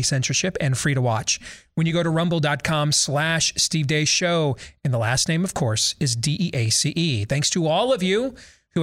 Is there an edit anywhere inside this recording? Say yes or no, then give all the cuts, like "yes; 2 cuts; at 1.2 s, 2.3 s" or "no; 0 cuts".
no; 0 cuts